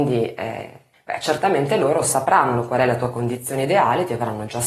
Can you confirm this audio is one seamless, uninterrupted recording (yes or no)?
no